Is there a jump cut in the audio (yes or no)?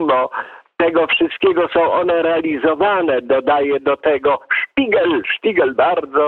no